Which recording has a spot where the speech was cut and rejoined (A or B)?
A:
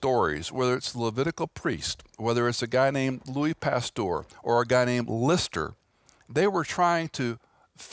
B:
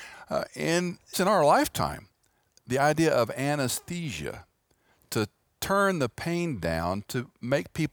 B